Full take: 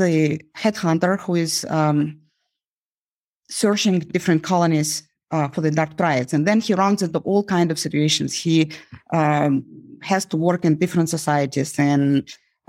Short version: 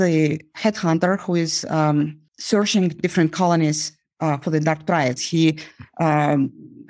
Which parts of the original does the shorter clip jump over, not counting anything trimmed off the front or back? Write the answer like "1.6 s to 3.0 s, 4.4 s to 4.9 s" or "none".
2.3 s to 3.4 s, 6.3 s to 8.3 s